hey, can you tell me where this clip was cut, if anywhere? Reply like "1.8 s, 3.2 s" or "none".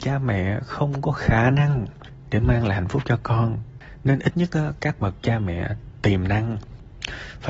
4.2 s